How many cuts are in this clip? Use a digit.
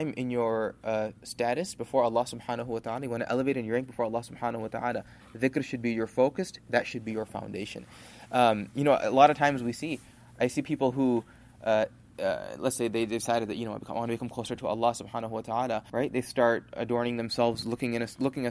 1